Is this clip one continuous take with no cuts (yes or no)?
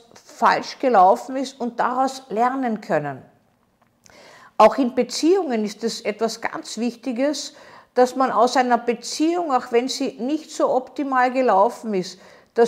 yes